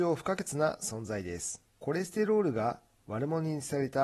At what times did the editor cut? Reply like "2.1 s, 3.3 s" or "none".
1.7 s